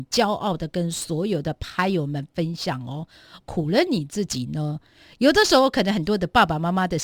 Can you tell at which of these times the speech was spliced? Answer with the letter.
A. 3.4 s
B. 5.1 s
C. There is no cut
A